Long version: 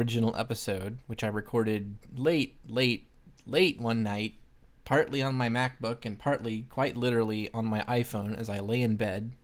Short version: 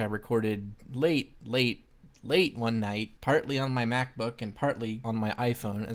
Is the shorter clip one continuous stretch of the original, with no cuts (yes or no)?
no